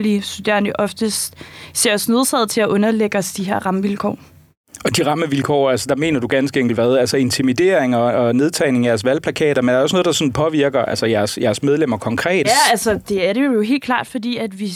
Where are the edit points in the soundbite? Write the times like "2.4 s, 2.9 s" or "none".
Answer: 12.4 s

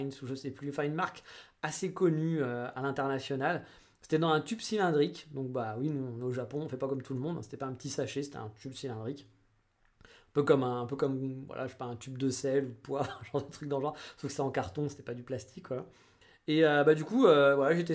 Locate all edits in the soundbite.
none

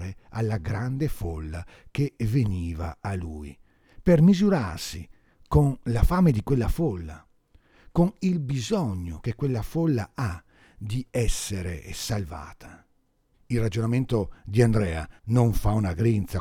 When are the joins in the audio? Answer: 13.3 s, 15.2 s

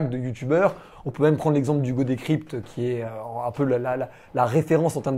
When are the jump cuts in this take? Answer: none

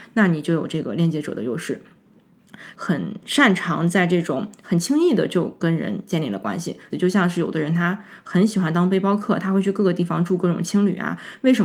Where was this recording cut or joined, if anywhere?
2.7 s, 6.9 s

